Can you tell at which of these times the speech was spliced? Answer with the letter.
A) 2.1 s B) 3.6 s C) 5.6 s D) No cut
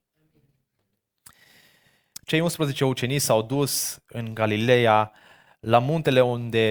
A